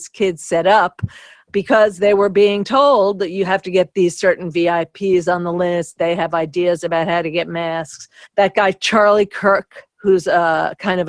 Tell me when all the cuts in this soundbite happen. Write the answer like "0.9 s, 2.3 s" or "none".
8.2 s